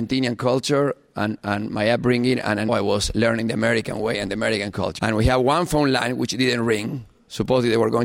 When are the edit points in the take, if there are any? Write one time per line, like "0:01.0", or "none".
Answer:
0:02.7
0:05.0